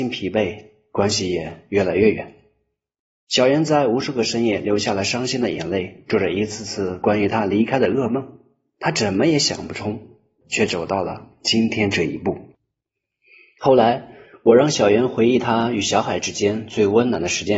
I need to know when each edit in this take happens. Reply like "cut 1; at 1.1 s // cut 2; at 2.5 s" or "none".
cut 1; at 10.4 s